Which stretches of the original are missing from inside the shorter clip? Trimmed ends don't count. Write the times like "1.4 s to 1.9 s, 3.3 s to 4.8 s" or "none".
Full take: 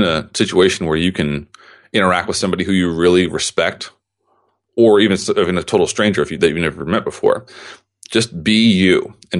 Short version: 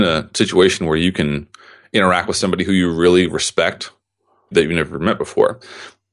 4.5 s to 6.4 s